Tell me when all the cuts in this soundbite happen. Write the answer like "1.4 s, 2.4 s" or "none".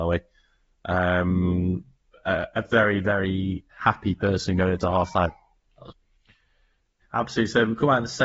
3.7 s, 7.0 s